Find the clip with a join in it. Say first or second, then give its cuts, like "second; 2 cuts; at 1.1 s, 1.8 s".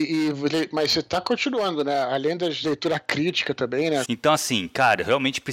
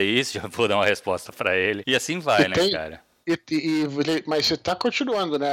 first; 2 cuts; at 2.6 s, 4.0 s